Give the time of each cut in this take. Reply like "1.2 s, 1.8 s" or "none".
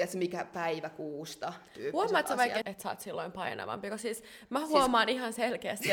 2.6 s